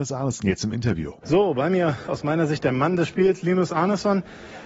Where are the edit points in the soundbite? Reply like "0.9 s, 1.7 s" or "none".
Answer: none